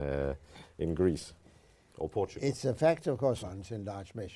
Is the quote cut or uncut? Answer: cut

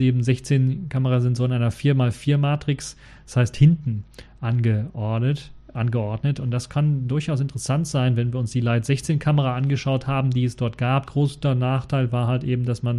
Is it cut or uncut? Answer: cut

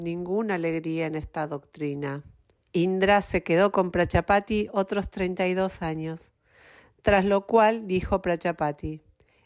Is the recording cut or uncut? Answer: cut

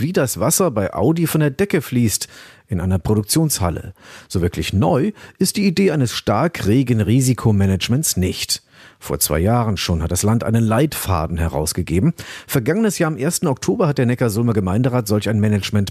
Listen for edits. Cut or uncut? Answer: uncut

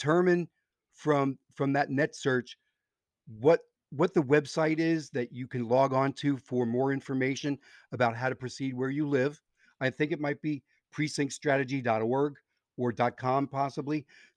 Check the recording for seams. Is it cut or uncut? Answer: uncut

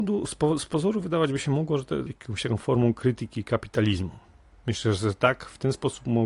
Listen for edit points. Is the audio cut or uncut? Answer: cut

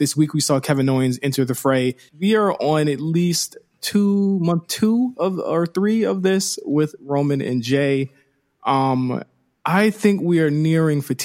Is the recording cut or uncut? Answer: cut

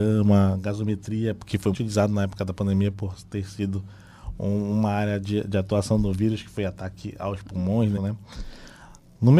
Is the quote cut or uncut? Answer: cut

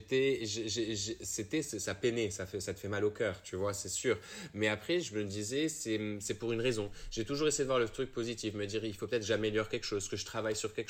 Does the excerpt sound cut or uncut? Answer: uncut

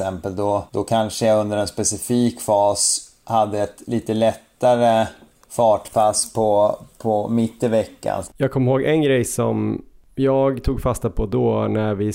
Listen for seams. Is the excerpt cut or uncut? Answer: cut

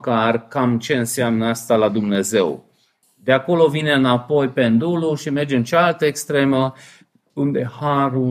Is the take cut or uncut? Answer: cut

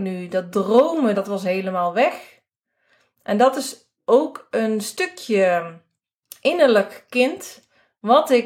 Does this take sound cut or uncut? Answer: cut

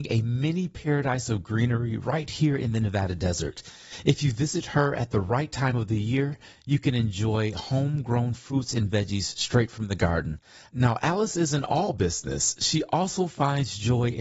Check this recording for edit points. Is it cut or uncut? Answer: cut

